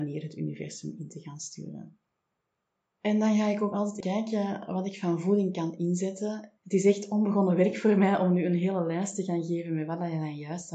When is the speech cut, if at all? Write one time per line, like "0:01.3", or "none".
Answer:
0:04.0
0:06.6